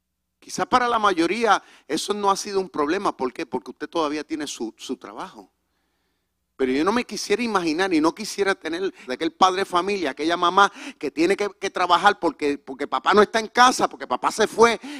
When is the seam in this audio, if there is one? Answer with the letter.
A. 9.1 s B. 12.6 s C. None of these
A